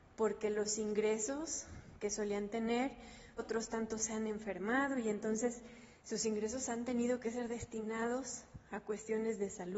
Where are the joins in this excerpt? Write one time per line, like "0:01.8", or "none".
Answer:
0:03.4
0:06.0